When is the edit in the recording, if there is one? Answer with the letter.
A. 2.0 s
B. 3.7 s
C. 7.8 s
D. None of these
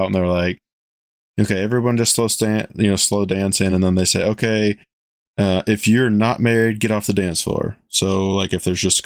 D